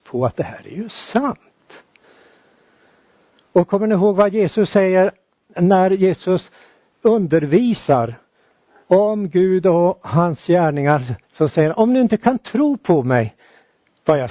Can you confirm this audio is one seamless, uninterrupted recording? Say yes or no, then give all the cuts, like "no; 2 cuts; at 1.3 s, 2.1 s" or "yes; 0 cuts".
no; 2 cuts; at 7.0 s, 11.2 s